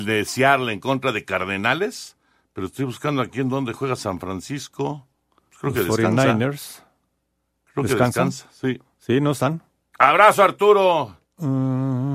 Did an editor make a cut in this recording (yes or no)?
yes